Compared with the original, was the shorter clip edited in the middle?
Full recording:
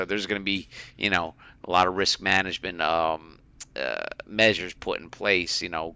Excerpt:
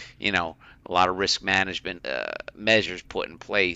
yes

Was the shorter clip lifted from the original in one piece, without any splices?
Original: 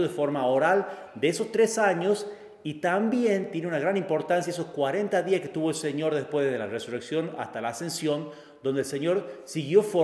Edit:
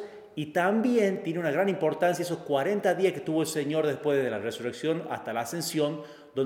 yes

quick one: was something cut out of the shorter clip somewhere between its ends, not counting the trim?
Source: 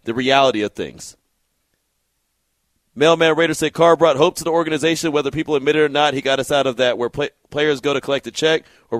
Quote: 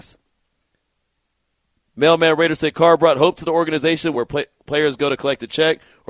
yes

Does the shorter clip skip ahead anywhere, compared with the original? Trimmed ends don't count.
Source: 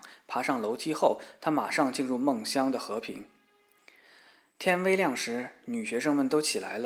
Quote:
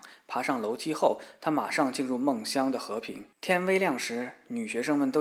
yes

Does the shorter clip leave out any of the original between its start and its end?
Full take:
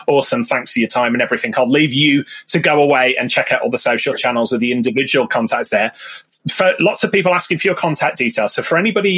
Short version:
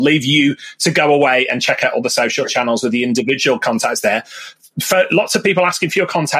no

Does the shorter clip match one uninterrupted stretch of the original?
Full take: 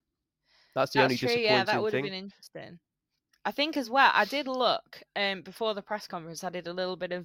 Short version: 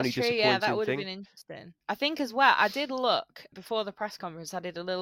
no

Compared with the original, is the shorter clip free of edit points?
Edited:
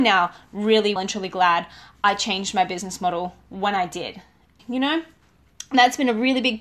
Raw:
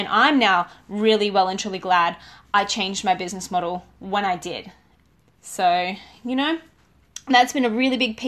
no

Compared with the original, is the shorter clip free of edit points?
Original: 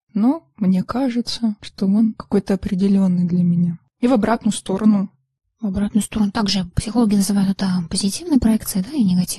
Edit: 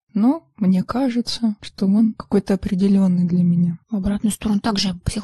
no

